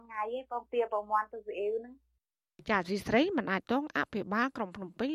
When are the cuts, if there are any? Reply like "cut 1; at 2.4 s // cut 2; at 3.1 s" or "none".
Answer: cut 1; at 3.6 s